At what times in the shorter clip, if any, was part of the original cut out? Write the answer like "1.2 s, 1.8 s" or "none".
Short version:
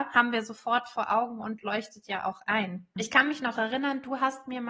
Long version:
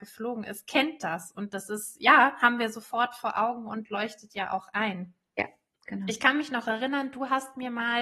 3.0 s